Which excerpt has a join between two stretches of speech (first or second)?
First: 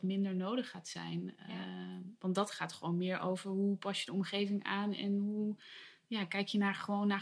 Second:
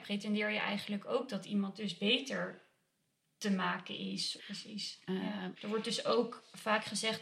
second